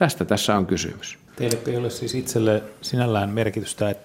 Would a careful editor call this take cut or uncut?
cut